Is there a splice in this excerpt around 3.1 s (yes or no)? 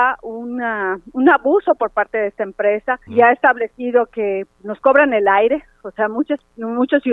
yes